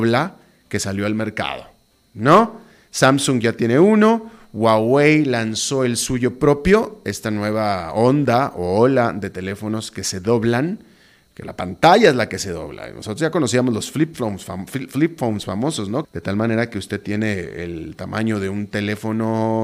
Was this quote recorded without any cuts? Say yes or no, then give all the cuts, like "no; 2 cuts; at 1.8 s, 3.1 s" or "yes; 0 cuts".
no; 1 cut; at 16.0 s